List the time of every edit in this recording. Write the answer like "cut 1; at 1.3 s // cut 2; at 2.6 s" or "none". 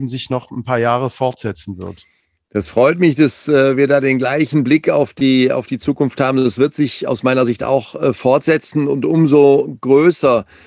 none